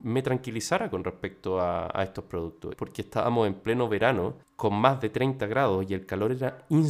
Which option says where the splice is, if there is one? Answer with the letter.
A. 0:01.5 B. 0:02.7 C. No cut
B